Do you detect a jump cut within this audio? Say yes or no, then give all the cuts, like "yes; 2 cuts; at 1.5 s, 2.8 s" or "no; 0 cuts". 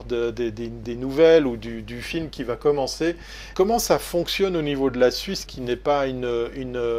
yes; 2 cuts; at 3.5 s, 5.5 s